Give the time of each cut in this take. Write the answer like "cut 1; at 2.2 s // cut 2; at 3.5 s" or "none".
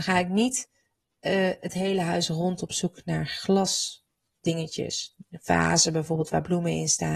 none